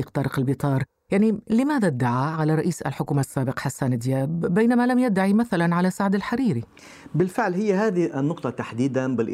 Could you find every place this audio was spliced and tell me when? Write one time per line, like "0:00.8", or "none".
none